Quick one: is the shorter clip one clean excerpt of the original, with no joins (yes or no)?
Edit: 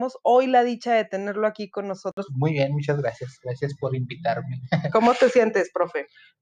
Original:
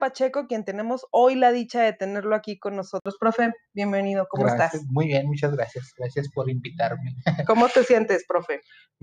no